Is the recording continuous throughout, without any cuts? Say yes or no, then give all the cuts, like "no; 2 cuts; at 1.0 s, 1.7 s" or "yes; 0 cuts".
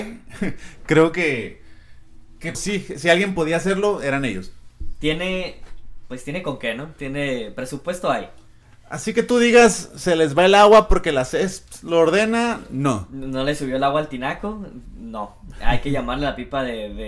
no; 1 cut; at 2.5 s